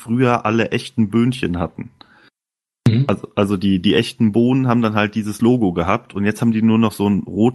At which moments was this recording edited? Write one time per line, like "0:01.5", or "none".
none